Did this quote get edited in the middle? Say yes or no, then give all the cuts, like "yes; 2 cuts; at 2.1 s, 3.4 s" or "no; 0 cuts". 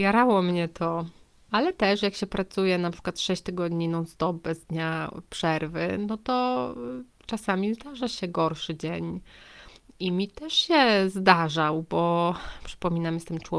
yes; 1 cut; at 1.5 s